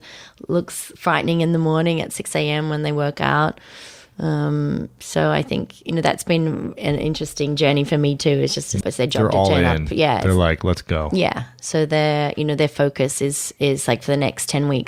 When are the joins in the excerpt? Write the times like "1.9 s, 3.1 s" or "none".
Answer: 8.8 s